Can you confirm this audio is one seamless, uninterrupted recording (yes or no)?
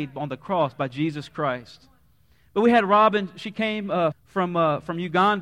no